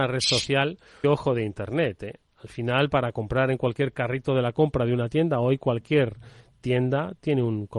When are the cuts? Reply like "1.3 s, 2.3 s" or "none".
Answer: 1.0 s